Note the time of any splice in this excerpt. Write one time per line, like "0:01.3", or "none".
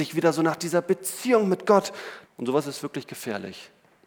0:02.2

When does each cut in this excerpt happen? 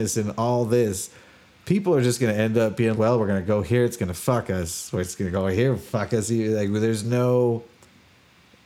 0:02.9

